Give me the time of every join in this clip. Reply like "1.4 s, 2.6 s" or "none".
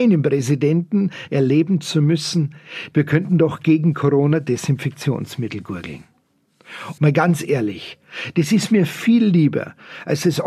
2.9 s, 7.0 s